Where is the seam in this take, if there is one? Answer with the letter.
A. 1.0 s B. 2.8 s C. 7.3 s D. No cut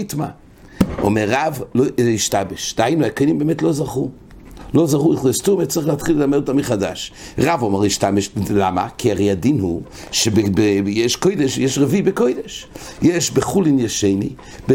C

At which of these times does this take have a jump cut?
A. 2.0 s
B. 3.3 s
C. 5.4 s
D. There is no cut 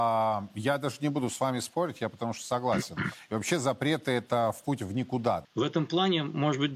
C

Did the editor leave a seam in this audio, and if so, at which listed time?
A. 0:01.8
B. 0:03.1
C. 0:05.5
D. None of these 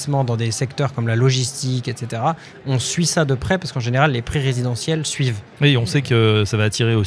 D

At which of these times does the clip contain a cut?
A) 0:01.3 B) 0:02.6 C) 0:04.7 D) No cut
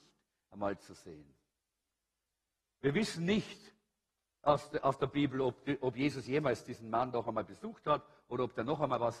B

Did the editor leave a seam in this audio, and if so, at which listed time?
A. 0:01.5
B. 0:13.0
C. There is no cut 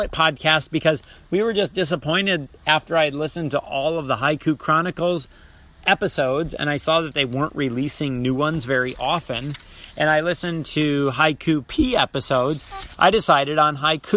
B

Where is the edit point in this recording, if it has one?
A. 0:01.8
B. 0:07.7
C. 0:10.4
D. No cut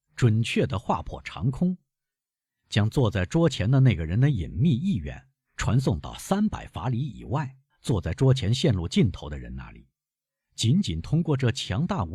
B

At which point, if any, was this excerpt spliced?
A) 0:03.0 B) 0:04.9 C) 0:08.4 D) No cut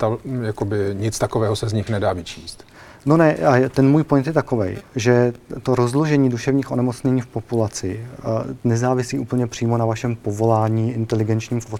D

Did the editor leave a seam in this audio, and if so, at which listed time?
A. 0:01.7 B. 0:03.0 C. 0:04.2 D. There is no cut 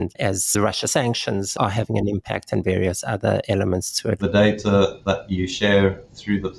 C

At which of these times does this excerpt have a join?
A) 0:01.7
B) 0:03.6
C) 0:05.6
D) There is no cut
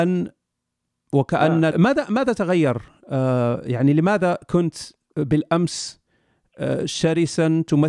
A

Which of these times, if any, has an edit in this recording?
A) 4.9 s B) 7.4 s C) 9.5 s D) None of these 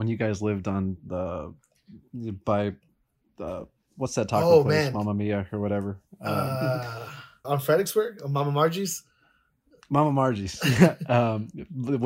B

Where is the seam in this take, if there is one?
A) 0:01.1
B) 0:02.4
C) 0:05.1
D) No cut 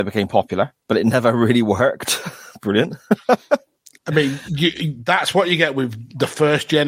D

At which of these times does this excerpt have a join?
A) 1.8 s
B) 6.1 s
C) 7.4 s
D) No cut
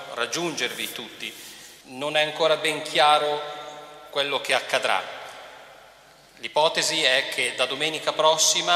A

